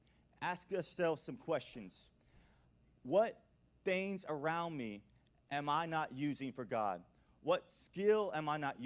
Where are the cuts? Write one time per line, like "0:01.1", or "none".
none